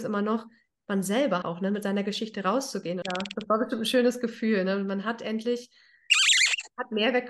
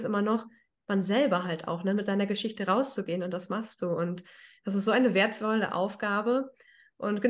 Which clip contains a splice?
first; 2 cuts; at 1.4 s, 3.0 s

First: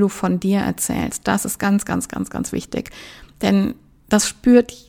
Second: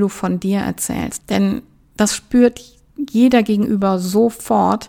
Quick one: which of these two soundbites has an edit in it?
second; 1 cut; at 1.2 s

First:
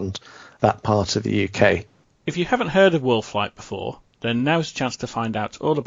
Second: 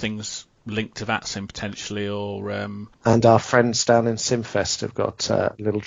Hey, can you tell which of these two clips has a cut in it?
first; 1 cut; at 2.0 s

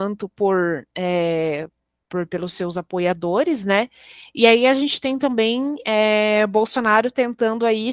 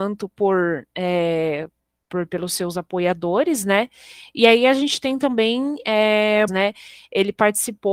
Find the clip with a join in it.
second; 1 cut; at 6.5 s

